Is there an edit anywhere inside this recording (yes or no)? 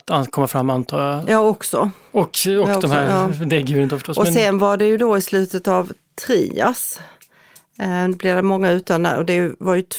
no